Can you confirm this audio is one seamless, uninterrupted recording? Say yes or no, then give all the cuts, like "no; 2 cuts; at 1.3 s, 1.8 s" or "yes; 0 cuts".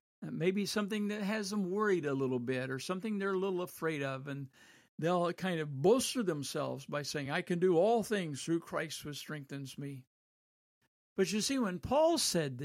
yes; 0 cuts